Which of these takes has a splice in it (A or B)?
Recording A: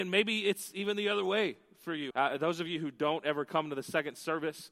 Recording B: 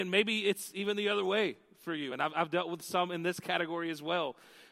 A